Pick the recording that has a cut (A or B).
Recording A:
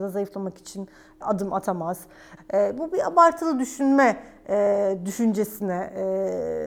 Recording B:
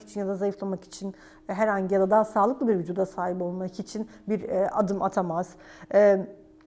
A